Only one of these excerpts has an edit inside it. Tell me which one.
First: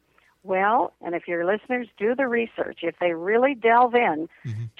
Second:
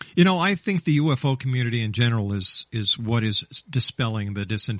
first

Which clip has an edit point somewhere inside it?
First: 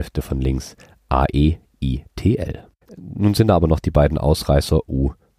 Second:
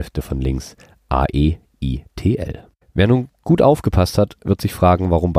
first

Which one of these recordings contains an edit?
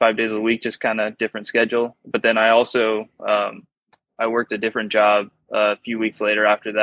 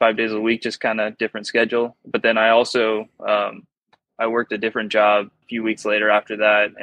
second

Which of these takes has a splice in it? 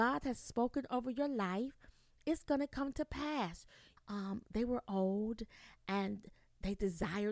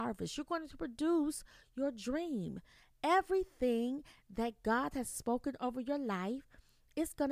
first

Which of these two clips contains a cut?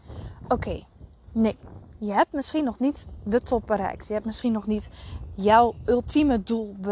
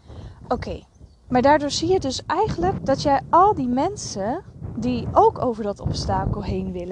second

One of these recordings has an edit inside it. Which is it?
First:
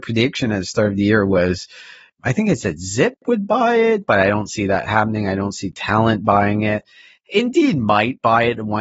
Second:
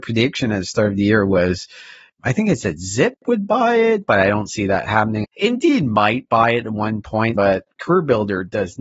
second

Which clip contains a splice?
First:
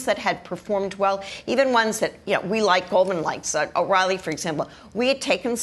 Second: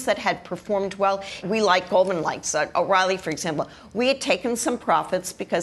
second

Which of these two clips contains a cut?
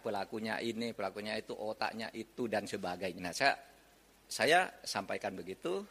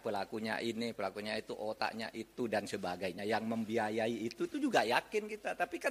first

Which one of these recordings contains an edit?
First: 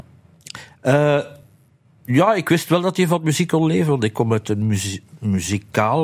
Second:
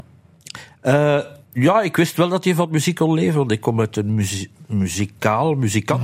second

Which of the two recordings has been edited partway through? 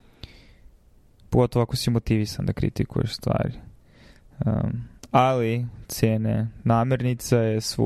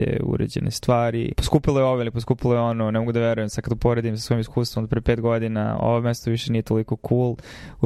second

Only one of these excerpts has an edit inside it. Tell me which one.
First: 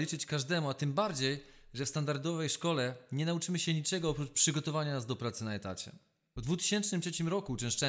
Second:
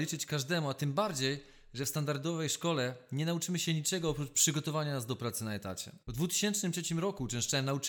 second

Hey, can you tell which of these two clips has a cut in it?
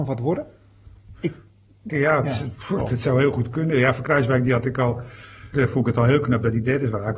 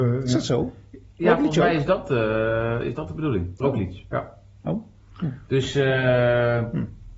first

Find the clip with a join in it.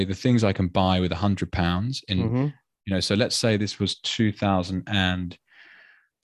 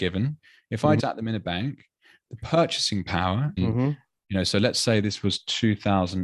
second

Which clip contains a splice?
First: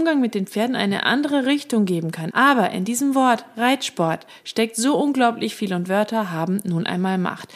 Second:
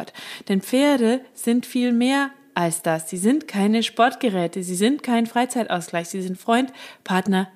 first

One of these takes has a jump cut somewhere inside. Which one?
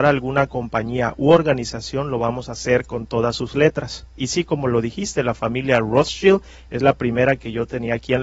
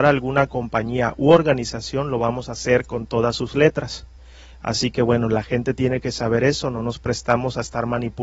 first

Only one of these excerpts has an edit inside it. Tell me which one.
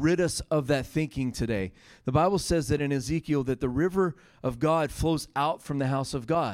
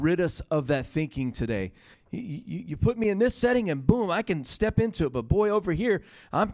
second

